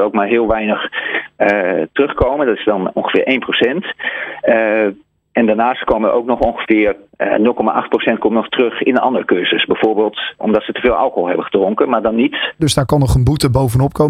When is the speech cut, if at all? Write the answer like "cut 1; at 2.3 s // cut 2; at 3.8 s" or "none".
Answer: cut 1; at 10.4 s // cut 2; at 12.6 s